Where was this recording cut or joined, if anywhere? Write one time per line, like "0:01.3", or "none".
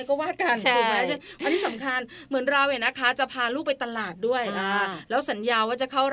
none